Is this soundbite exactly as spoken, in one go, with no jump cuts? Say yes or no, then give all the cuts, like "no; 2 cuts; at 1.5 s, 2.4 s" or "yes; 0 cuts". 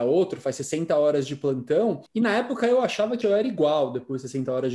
no; 2 cuts; at 2.1 s, 3.2 s